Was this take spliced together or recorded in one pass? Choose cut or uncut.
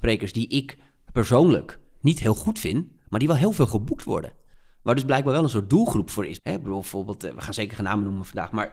cut